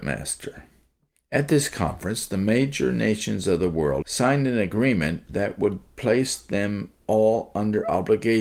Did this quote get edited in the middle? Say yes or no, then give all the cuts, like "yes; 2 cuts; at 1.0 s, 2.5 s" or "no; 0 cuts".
yes; 2 cuts; at 1.2 s, 4.0 s